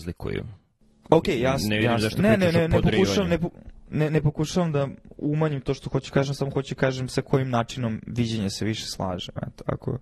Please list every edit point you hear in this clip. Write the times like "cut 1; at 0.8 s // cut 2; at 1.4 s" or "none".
none